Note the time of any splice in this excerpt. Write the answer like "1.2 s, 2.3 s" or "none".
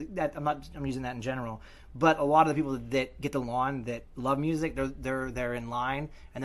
none